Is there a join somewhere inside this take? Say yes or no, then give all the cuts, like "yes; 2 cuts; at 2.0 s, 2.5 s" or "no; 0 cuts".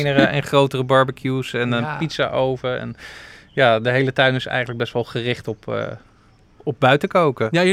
no; 0 cuts